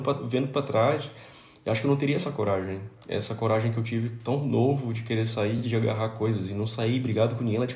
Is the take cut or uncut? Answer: uncut